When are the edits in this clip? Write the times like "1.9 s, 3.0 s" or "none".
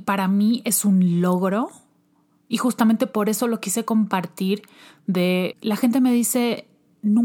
5.5 s